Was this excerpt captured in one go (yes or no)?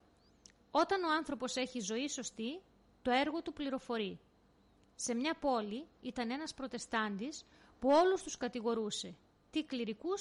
yes